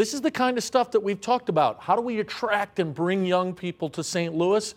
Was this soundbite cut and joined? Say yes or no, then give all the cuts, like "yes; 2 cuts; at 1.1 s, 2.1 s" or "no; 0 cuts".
no; 0 cuts